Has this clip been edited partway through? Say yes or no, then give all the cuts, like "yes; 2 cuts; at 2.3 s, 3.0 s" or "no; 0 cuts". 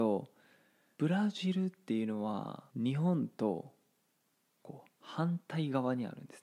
yes; 2 cuts; at 1.0 s, 2.7 s